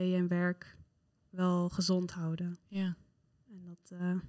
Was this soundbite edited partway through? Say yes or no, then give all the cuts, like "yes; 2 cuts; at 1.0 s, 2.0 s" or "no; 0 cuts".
no; 0 cuts